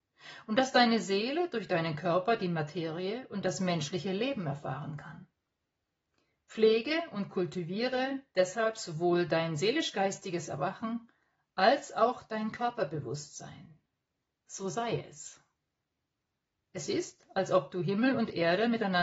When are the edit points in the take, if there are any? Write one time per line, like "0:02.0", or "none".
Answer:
0:16.6